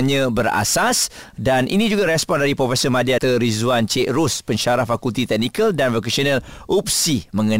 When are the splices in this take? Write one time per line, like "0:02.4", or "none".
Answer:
0:03.2